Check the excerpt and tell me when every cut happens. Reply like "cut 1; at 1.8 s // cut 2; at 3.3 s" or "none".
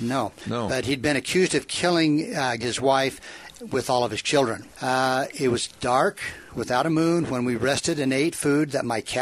cut 1; at 2.6 s // cut 2; at 4.7 s

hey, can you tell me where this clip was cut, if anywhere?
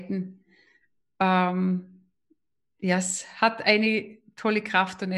none

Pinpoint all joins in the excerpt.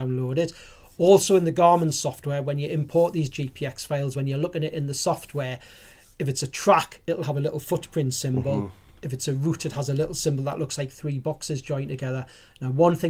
none

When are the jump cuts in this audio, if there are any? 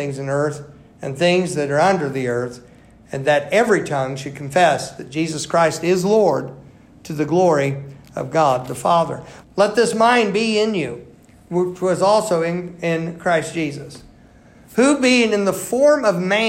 cut 1; at 9.4 s

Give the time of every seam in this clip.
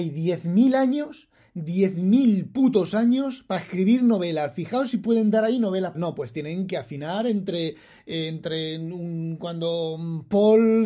cut 1; at 5.9 s

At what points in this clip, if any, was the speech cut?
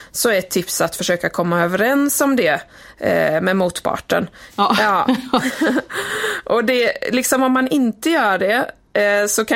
cut 1; at 4.5 s

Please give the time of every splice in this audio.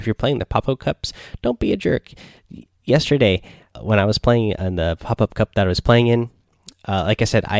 cut 1; at 3.7 s

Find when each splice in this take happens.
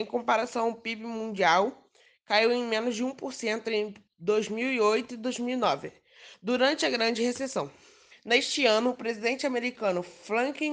cut 1; at 8.1 s

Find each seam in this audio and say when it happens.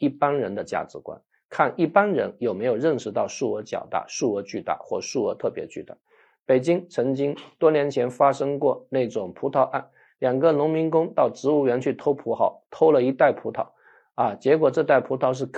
none

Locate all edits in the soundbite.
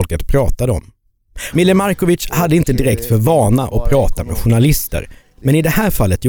cut 1; at 1.5 s

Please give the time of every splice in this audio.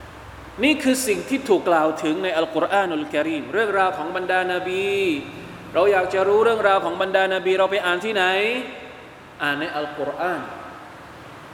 cut 1; at 1.6 s

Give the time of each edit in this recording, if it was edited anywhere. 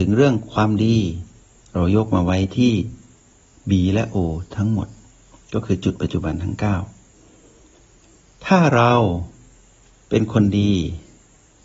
none

